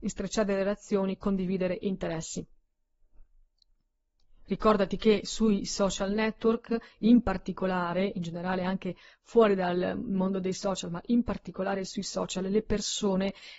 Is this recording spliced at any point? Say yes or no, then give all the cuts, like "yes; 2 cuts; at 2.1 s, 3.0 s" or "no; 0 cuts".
no; 0 cuts